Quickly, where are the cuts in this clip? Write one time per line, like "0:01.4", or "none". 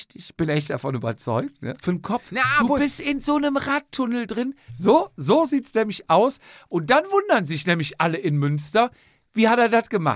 0:01.8
0:04.7